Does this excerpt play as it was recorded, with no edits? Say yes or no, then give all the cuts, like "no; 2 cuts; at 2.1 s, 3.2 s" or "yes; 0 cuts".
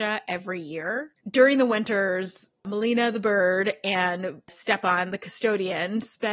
no; 1 cut; at 1.2 s